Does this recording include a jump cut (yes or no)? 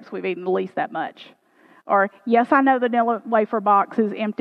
no